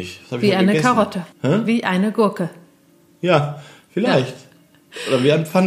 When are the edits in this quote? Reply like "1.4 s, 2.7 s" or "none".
1.3 s